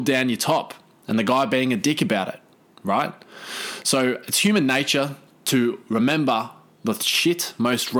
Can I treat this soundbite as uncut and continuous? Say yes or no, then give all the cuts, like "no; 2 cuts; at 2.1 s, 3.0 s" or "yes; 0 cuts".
yes; 0 cuts